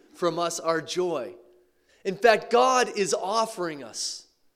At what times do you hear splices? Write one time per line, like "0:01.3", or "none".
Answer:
0:01.9